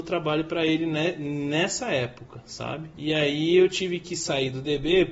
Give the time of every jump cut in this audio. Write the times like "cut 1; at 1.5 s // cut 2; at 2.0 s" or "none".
cut 1; at 2.9 s